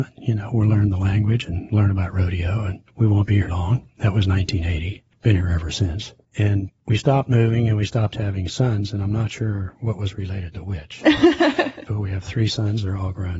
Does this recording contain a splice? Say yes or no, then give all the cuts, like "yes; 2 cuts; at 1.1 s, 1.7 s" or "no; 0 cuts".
yes; 1 cut; at 3.5 s